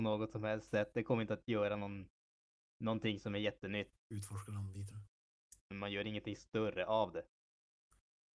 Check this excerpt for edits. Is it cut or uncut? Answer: cut